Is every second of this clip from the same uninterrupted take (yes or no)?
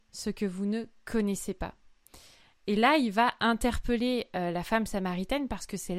yes